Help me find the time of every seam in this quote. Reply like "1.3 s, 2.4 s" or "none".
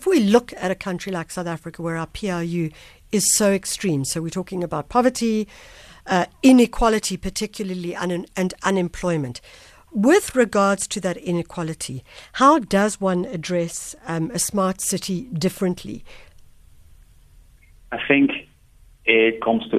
none